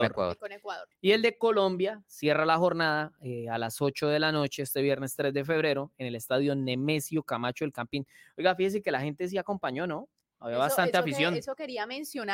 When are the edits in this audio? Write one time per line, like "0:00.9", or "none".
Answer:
0:00.9